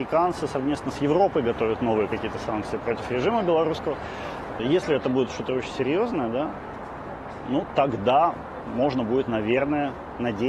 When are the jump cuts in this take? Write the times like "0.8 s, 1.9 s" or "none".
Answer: 4.6 s

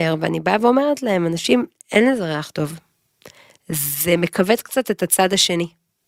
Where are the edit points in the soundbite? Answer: none

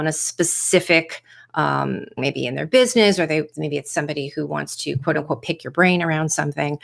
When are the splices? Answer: 2.2 s

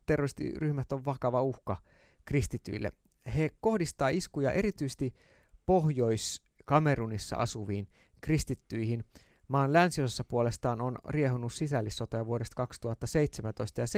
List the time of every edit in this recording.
none

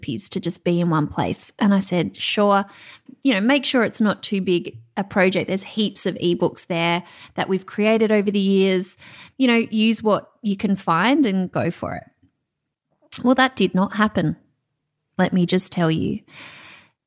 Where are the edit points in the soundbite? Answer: none

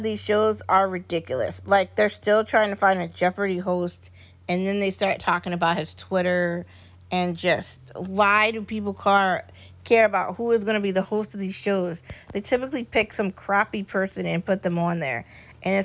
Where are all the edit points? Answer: none

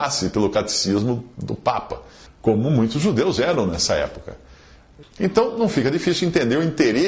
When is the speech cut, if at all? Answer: 2.3 s, 5.0 s

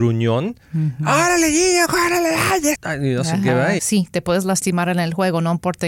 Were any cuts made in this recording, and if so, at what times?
2.7 s, 3.8 s

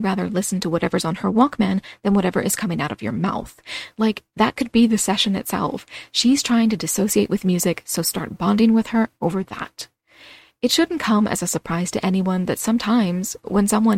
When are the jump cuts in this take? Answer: none

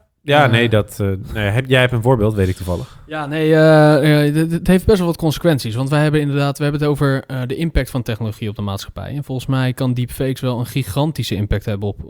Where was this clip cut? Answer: none

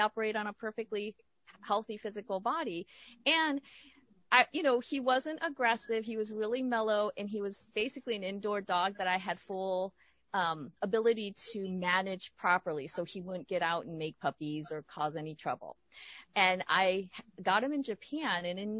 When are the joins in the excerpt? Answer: 16.2 s

